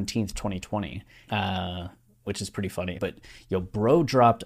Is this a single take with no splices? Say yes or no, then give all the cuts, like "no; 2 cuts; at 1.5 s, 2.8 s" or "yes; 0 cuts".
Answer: no; 2 cuts; at 1.3 s, 2.9 s